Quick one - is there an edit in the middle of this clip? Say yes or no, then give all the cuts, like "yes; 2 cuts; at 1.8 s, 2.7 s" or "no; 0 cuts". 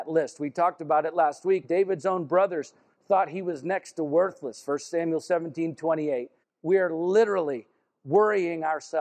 yes; 2 cuts; at 1.6 s, 6.4 s